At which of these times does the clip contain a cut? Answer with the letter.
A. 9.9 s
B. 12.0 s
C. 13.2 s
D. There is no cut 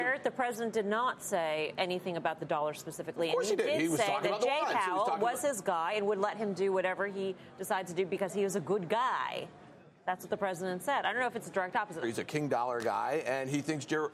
B